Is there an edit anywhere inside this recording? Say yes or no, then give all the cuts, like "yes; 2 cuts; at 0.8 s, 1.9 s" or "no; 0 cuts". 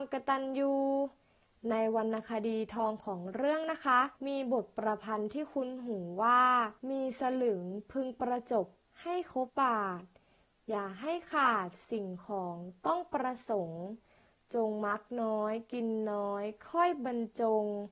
yes; 3 cuts; at 4.2 s, 6.8 s, 9.5 s